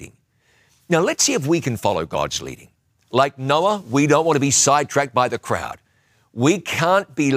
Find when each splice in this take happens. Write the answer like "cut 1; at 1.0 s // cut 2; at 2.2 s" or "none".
none